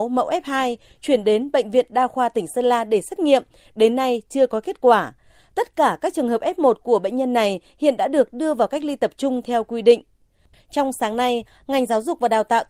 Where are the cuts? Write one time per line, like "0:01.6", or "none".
none

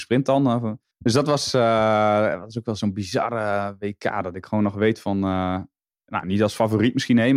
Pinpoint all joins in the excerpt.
0:00.9
0:06.2

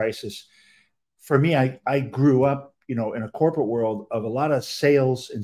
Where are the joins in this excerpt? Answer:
none

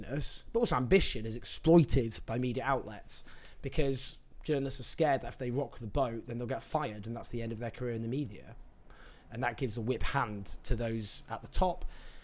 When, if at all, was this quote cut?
0:10.6

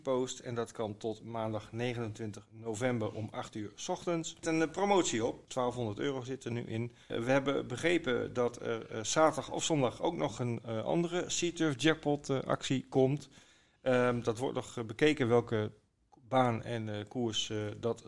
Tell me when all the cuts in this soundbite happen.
0:05.5

